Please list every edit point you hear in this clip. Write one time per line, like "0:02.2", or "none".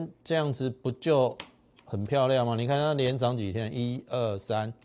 none